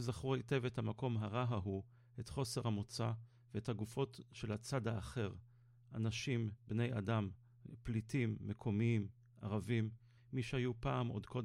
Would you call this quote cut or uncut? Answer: cut